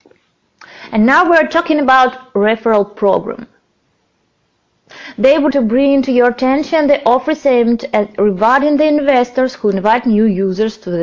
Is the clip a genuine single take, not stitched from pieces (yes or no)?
no